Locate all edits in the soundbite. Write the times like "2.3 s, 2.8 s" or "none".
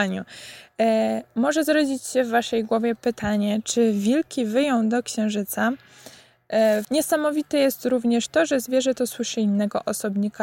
6.8 s